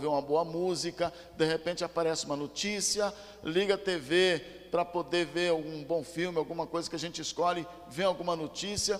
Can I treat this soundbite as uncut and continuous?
yes; 0 cuts

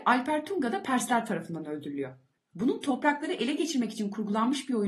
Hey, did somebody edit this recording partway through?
yes; 1 cut; at 2.4 s

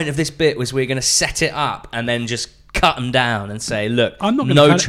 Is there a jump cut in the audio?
no; 0 cuts

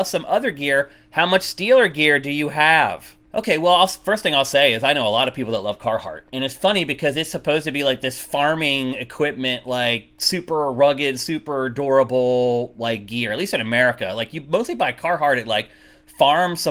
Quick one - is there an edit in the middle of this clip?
yes; 1 cut; at 3.2 s

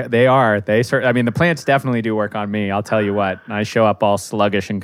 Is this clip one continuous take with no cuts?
yes; 0 cuts

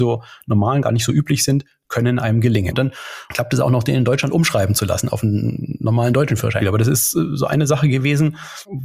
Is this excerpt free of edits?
no; 2 cuts; at 2.7 s, 6.6 s

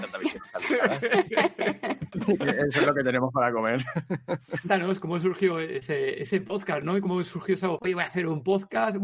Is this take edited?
no; 0 cuts

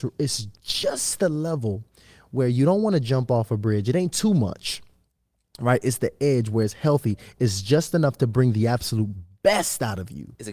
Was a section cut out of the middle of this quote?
no; 0 cuts

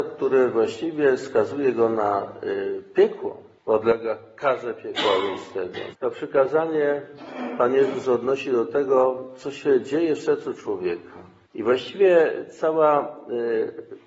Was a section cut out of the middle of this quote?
yes; 1 cut; at 5.9 s

